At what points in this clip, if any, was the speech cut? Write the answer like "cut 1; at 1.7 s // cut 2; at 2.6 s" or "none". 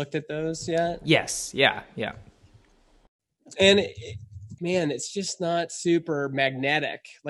cut 1; at 4.6 s